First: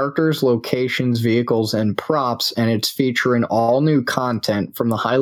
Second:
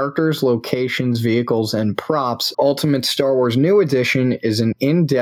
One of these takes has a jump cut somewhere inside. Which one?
second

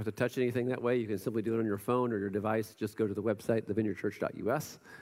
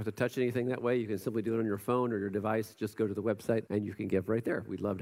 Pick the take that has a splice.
second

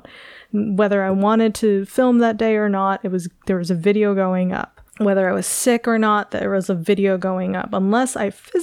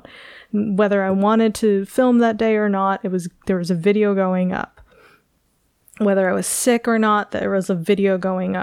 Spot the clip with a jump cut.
first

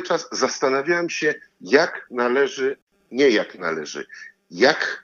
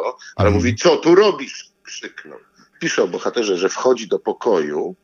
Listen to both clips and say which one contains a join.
second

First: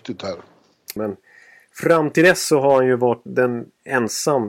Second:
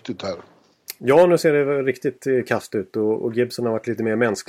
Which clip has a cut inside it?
first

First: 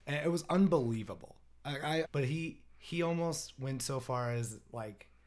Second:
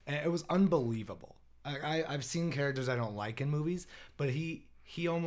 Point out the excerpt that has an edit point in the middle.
first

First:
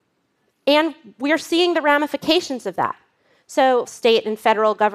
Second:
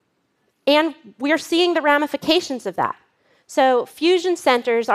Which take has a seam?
first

